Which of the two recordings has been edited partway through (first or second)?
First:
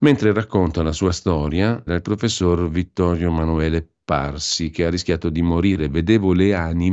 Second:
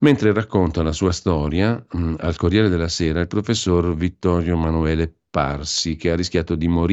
first